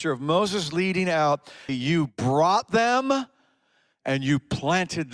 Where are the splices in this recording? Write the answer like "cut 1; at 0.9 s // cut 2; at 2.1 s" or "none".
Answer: cut 1; at 1.7 s

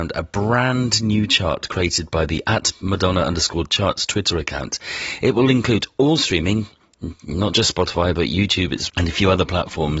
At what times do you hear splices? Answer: cut 1; at 8.9 s

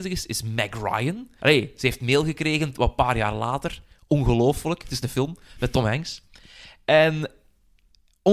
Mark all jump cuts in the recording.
cut 1; at 1.4 s

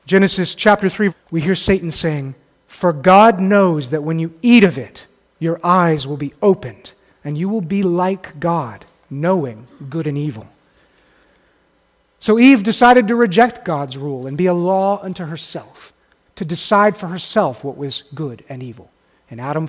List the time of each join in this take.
cut 1; at 1.1 s

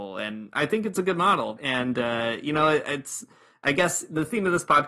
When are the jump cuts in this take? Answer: cut 1; at 1.6 s

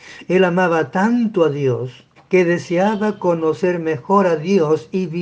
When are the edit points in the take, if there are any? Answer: cut 1; at 2.2 s

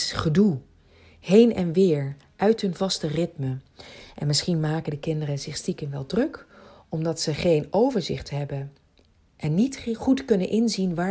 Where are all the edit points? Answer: none

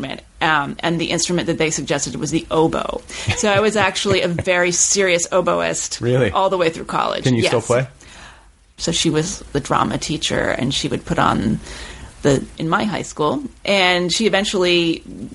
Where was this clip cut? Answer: cut 1; at 8.8 s // cut 2; at 12.5 s

